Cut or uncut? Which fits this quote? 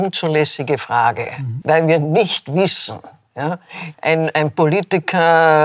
cut